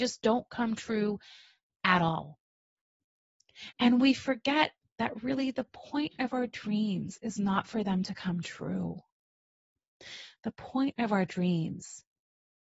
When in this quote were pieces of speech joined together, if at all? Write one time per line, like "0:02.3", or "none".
0:03.7